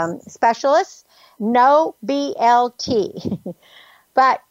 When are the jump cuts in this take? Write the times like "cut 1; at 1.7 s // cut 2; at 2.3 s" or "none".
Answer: cut 1; at 1.4 s